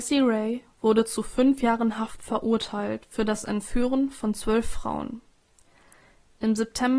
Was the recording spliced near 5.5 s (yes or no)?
no